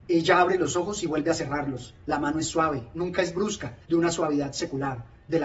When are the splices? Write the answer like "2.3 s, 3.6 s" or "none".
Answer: 2.0 s, 3.8 s